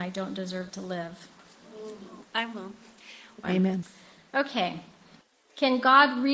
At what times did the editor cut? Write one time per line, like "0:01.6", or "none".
0:02.2
0:03.4